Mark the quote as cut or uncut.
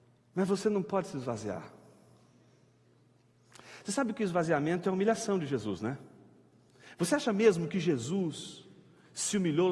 uncut